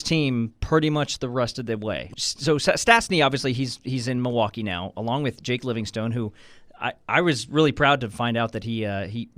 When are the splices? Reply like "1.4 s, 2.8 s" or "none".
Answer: 2.1 s